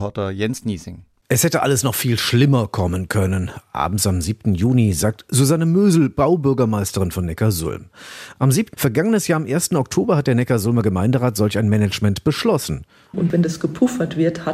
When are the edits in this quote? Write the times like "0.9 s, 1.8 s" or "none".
8.7 s, 13.1 s